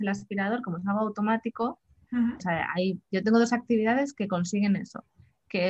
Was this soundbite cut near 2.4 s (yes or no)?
yes